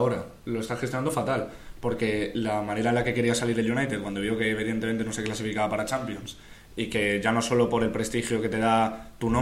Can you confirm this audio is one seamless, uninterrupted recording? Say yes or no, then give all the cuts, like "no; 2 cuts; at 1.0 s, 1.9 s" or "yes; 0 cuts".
yes; 0 cuts